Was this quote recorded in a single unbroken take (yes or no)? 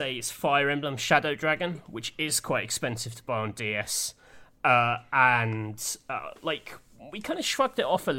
yes